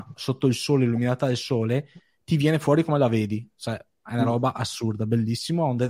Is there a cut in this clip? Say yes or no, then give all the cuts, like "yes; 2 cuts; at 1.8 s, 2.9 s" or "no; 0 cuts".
no; 0 cuts